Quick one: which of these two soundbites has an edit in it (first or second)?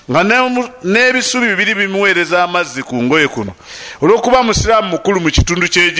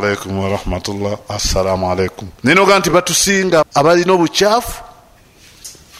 second